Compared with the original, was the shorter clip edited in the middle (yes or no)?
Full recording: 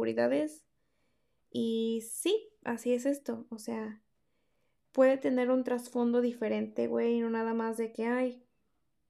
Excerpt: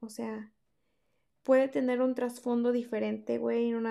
no